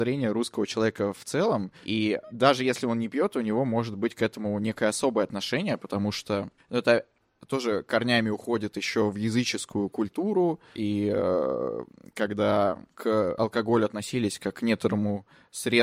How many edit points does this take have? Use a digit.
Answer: 0